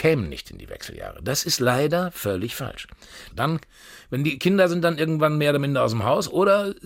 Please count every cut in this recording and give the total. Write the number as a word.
one